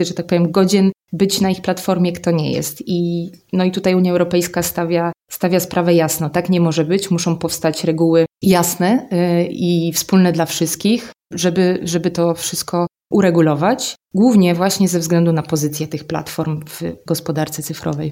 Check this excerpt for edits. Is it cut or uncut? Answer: uncut